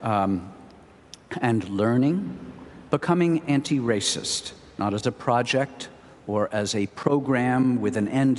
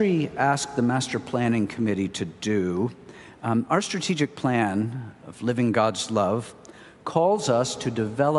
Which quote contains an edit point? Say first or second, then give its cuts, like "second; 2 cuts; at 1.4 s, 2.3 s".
first; 1 cut; at 2.9 s